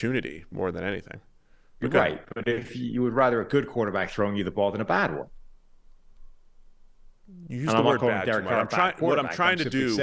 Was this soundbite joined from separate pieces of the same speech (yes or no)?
no